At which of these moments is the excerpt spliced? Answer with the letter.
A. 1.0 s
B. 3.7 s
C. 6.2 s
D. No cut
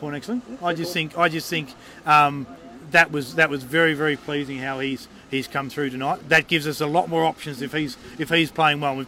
C